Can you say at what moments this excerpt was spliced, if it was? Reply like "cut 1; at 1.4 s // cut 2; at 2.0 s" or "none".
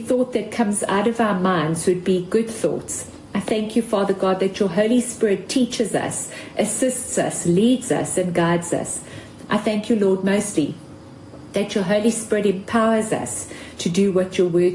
none